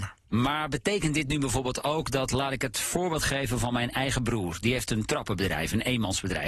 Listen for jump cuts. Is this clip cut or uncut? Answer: uncut